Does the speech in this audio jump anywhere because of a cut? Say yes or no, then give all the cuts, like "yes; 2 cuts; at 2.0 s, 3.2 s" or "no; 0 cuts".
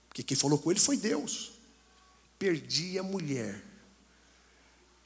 no; 0 cuts